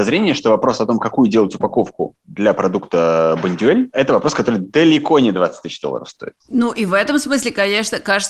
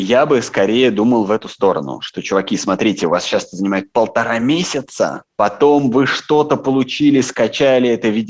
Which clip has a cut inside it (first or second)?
first